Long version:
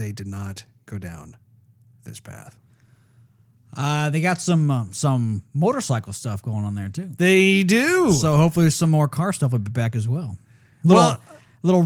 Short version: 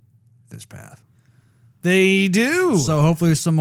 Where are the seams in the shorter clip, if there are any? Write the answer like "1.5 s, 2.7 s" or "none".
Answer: 1.8 s